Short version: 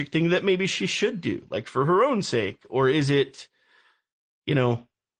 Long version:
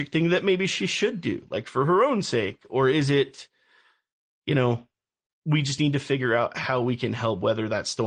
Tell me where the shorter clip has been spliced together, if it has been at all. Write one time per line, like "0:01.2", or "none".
none